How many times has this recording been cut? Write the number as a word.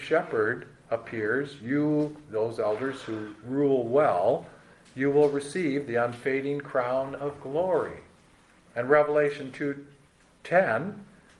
zero